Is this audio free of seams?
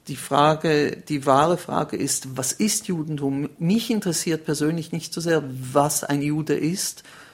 yes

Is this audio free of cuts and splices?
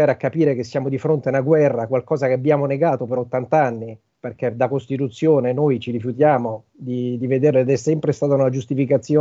yes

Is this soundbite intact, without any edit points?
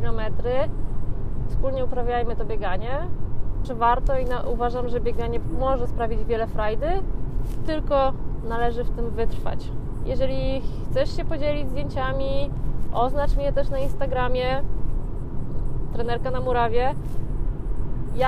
no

